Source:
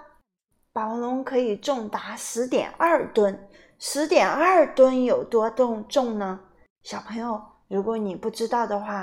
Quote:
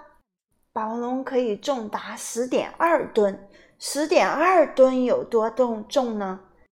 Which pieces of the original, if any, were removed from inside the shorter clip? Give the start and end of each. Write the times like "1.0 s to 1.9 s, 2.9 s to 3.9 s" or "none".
none

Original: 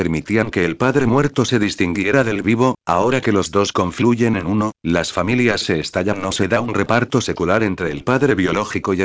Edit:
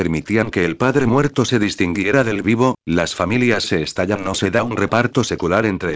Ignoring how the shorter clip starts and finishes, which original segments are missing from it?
2.8 s to 4.8 s

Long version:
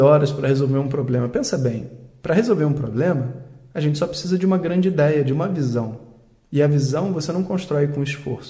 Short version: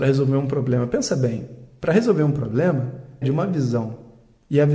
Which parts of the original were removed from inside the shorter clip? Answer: 3.6 s to 5.2 s

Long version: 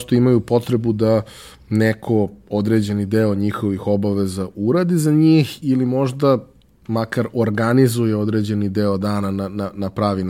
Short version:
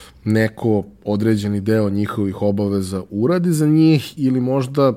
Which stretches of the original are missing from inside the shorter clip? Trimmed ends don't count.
none

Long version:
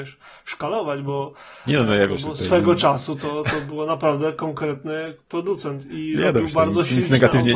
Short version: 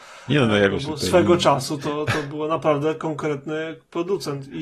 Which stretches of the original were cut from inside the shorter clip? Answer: none

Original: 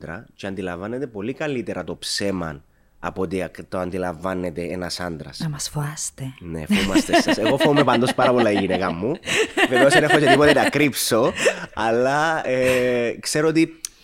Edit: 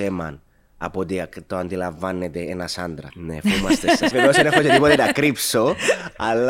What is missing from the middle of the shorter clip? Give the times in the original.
5.3 s to 6.4 s, 7.4 s to 9.7 s

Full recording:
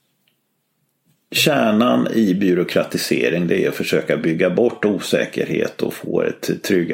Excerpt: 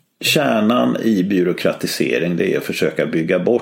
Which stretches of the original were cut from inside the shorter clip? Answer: none

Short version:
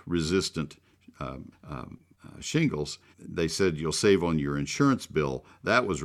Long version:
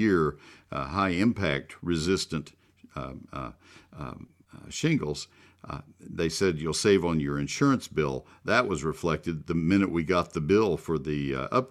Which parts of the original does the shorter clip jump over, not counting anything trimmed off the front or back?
3.3 s to 3.8 s, 5.4 s to 5.9 s

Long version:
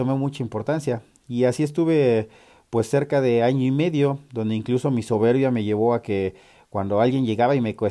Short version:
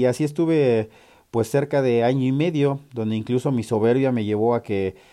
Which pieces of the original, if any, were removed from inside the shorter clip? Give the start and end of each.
none

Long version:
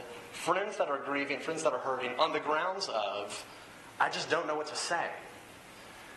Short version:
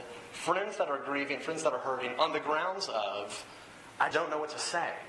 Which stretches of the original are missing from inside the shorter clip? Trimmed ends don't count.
4.1 s to 4.3 s

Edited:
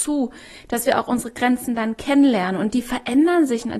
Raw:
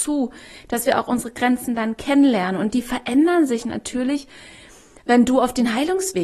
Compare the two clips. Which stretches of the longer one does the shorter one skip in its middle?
none

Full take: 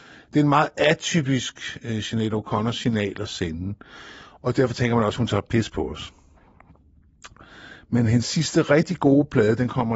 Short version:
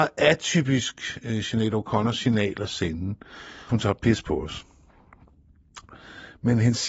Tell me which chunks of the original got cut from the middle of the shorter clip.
4.3 s to 5.2 s

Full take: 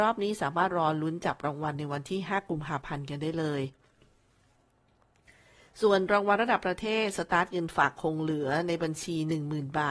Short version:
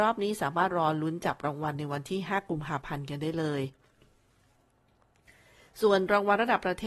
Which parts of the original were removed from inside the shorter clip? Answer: none

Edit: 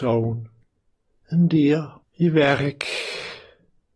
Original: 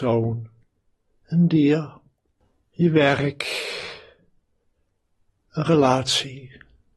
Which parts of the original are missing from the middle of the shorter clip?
2.0 s to 2.6 s

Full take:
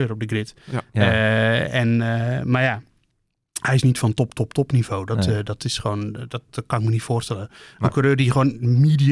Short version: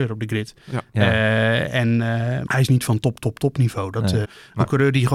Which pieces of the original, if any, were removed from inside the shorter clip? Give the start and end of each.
2.5 s to 3.6 s, 5.4 s to 7.5 s

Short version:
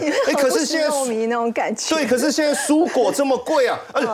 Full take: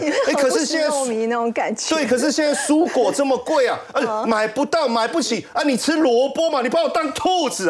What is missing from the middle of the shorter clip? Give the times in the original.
none

